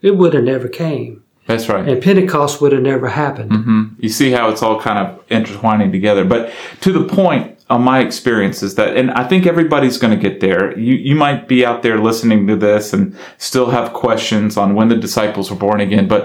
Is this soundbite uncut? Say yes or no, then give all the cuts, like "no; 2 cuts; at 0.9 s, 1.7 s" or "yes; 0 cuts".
yes; 0 cuts